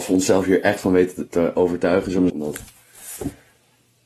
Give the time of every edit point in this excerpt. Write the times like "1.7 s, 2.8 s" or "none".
2.3 s